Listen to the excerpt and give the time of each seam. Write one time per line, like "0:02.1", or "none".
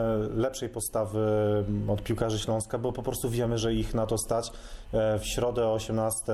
0:04.9